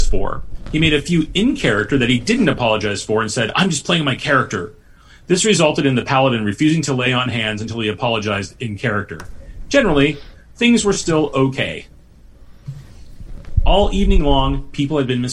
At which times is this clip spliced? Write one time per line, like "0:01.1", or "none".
none

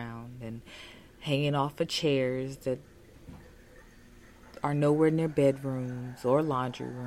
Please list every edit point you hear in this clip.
0:01.1

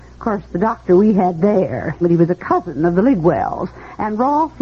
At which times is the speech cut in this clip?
0:02.0

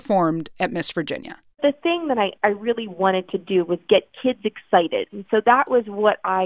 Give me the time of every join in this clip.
none

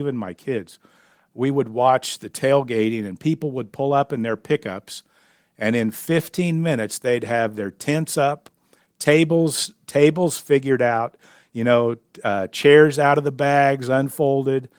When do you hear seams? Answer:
none

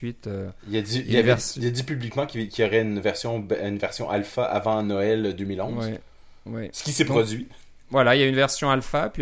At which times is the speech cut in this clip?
none

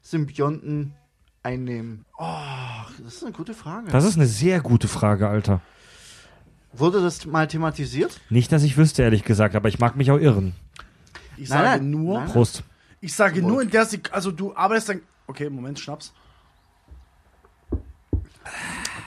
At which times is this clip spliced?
0:02.0
0:11.4

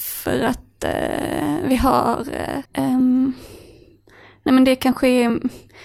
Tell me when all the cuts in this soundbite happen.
0:02.7

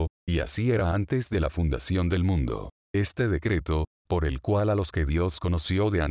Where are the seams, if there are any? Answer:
0:02.8

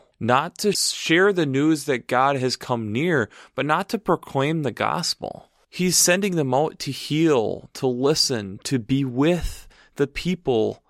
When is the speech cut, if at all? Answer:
none

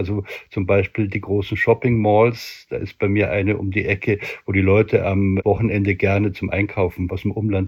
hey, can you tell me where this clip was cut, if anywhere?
none

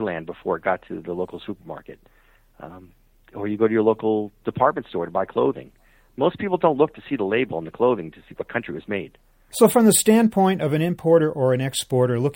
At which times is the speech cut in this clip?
0:09.5

